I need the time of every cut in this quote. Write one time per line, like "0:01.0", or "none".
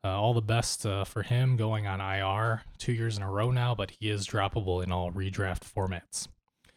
none